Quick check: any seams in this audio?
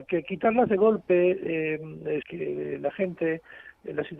yes; 1 cut; at 2.2 s

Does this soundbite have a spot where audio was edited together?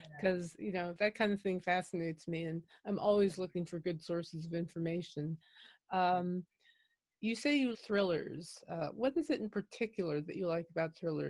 yes; 1 cut; at 7.7 s

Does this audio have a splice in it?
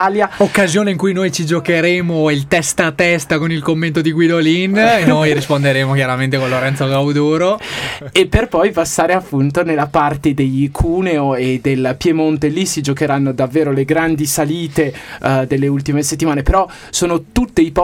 no; 0 cuts

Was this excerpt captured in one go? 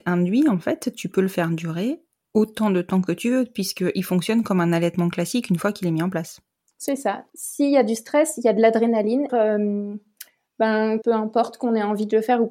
no; 3 cuts; at 7.3 s, 9.3 s, 11.0 s

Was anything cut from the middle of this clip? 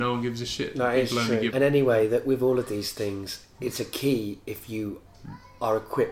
yes; 2 cuts; at 1.5 s, 3.5 s

